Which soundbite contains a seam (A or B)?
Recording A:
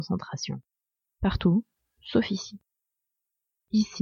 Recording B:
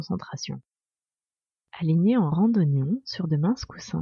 A